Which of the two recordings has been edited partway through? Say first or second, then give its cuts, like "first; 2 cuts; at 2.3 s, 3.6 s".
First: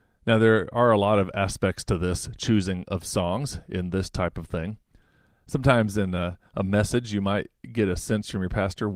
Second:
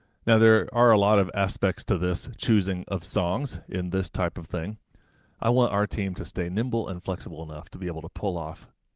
second; 1 cut; at 5.3 s